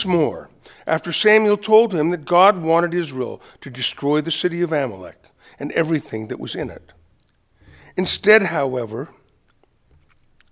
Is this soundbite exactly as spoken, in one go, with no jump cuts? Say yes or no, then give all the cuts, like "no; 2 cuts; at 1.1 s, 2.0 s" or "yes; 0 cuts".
yes; 0 cuts